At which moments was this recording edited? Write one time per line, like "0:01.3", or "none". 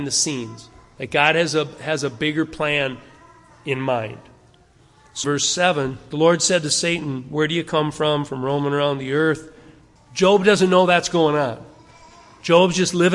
0:05.2
0:10.0